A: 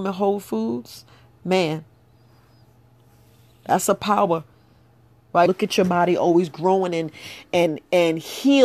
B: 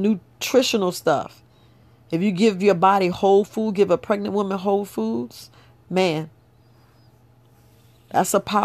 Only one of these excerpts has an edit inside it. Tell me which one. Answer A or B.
A